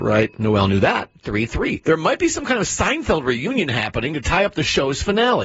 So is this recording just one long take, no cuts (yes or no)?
yes